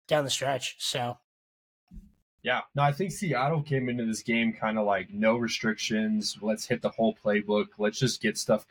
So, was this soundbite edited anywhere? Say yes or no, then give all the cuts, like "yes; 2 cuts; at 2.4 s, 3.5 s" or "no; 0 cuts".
yes; 2 cuts; at 2.7 s, 6.4 s